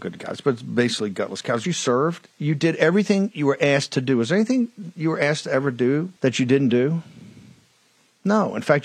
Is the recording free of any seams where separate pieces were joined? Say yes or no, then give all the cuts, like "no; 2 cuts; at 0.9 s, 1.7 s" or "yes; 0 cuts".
no; 2 cuts; at 1.6 s, 6.2 s